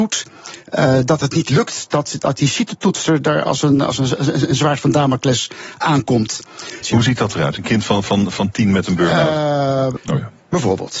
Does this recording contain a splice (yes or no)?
yes